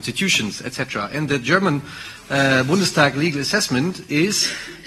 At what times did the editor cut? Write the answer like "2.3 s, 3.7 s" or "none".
none